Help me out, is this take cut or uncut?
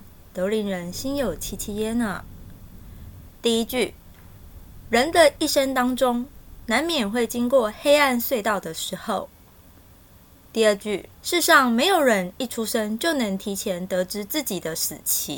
cut